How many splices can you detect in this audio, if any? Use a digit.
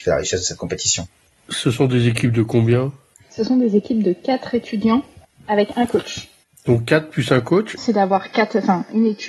1